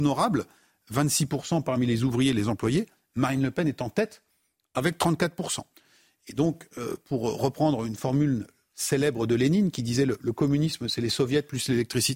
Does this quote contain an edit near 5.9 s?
no; 0 cuts

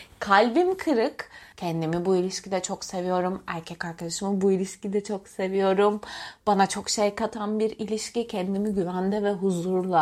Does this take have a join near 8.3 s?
no; 1 cut; at 1.5 s

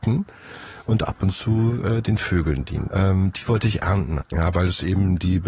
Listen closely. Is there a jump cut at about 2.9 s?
yes; 2 cuts; at 2.9 s, 4.2 s

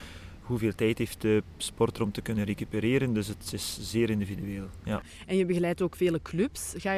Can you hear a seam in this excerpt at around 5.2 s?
no; 0 cuts

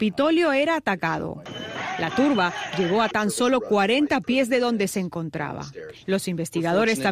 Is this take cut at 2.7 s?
yes; 2 cuts; at 2.7 s, 6.0 s

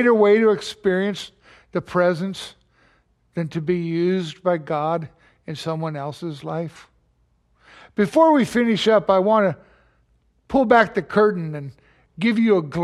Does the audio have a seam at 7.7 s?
no; 0 cuts

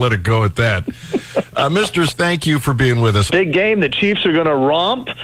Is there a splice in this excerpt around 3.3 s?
yes; 2 cuts; at 2.1 s, 3.3 s

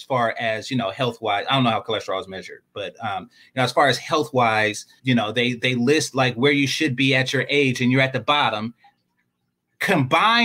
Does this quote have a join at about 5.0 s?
yes; 1 cut; at 5.0 s

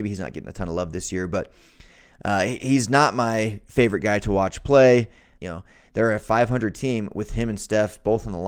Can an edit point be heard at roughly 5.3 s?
yes; 1 cut; at 5.3 s

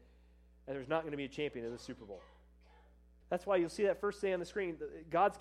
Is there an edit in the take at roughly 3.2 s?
yes; 1 cut; at 3.2 s

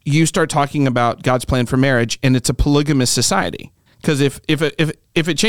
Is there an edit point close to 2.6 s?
no; 1 cut; at 3.9 s

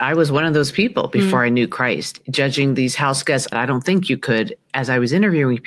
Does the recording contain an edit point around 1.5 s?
no; 1 cut; at 3.5 s

